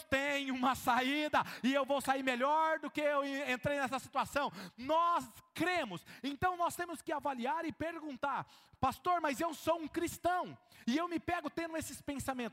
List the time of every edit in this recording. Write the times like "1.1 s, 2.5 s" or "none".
none

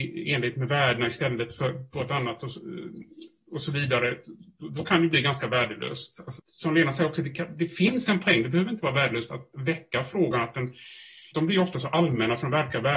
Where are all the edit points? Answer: 6.4 s, 11.3 s

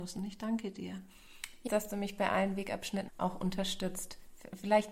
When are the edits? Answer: 1.7 s, 3.1 s

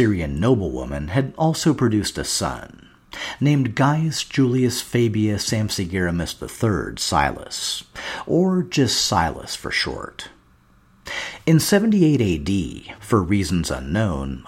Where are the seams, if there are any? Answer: none

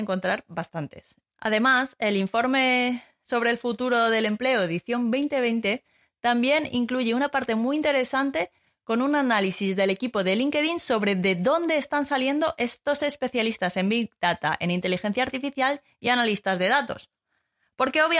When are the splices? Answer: 1.3 s

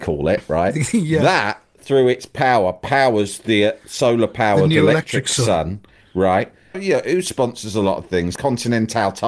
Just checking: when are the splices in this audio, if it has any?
6.7 s, 8.4 s

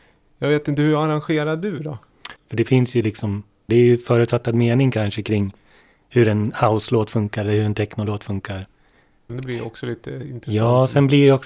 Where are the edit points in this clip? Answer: 2.4 s, 3.7 s, 9.3 s

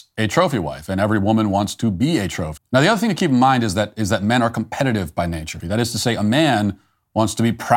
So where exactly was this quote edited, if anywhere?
2.6 s, 5.6 s

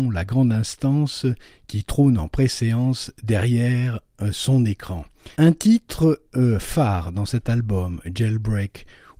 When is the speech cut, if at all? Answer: 5.3 s

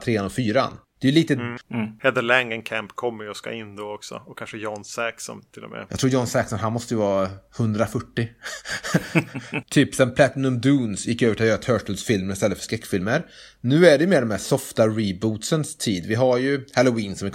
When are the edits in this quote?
1.6 s, 9.6 s

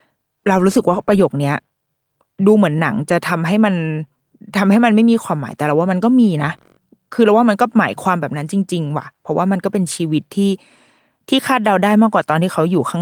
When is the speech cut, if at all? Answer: none

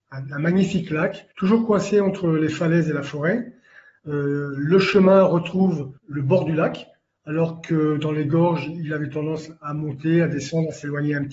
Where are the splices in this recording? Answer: 1.3 s, 6.0 s

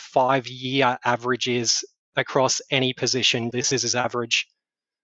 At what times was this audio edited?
3.5 s

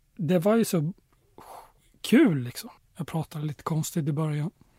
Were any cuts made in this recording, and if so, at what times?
2.8 s

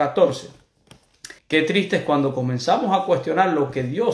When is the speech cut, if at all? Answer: 1.4 s

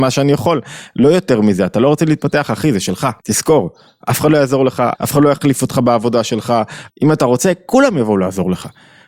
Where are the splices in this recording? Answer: 3.2 s, 4.9 s, 6.9 s

